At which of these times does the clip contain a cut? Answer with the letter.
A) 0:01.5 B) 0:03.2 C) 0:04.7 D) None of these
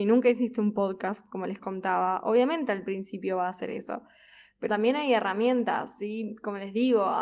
C